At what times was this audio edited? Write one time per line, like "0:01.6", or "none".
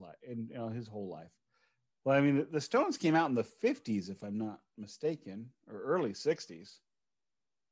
0:01.9